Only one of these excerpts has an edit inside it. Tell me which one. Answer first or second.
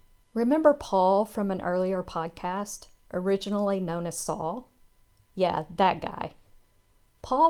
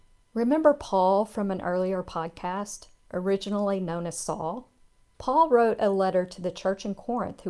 second